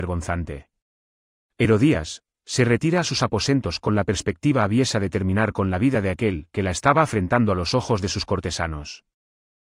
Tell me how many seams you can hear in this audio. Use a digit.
1